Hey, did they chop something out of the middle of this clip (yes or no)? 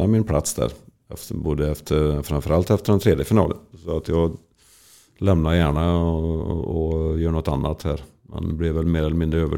no